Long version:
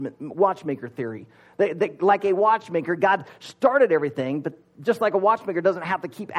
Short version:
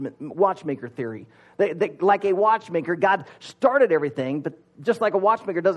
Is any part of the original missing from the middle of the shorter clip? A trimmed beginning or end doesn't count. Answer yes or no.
no